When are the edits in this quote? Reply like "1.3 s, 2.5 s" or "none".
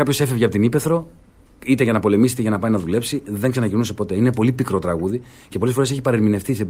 none